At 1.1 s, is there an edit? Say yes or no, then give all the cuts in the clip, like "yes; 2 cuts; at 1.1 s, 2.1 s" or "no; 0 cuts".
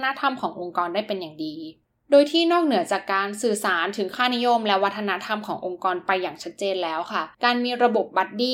no; 1 cut; at 7.3 s